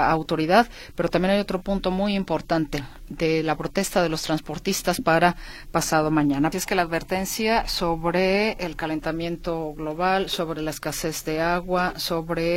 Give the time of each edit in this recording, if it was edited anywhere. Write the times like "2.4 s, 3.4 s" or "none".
6.5 s